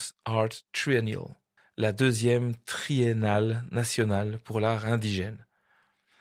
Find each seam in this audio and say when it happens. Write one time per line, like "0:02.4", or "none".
0:01.6